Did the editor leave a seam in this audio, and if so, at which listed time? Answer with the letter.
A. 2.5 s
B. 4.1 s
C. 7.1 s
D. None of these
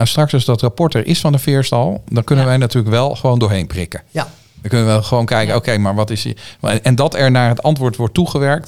D